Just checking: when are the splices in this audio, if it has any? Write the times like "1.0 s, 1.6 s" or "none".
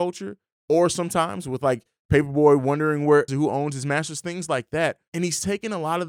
3.3 s